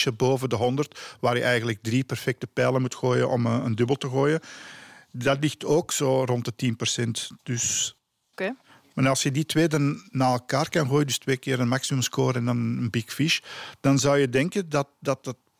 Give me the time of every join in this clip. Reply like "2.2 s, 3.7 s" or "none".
none

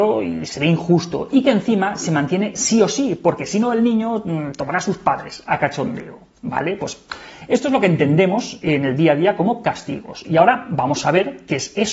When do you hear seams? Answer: none

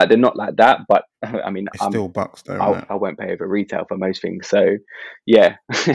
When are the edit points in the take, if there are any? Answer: 2.9 s

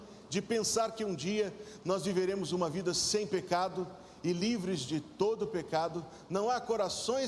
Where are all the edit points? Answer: 6.3 s

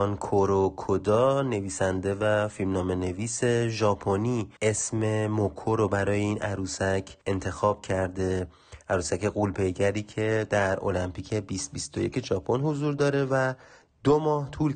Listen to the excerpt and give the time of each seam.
4.6 s, 7.2 s

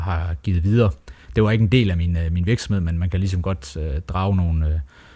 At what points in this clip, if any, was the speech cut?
1.2 s

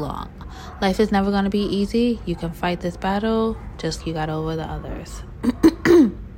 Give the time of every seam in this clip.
4.0 s

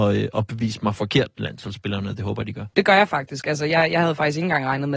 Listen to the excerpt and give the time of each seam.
2.7 s

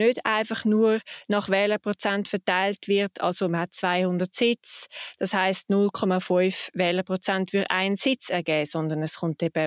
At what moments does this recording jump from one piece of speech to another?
none

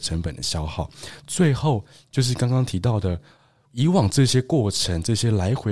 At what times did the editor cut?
none

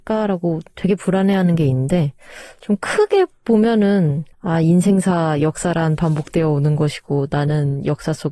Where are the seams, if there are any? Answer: 4.3 s

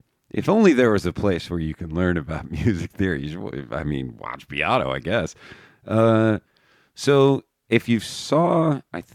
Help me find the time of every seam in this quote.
none

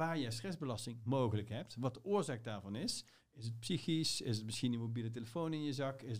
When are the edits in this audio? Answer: none

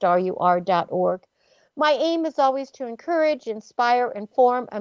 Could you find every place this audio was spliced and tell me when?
none

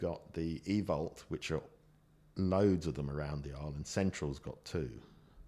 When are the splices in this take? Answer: none

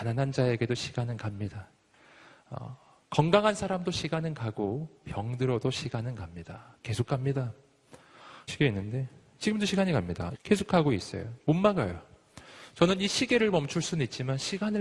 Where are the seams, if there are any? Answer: 8.5 s, 10.3 s

